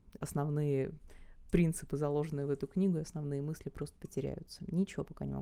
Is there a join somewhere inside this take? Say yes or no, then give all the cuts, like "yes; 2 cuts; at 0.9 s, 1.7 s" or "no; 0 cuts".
no; 0 cuts